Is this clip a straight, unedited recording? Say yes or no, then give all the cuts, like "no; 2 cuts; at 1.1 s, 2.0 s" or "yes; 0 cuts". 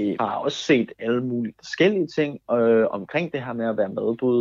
yes; 0 cuts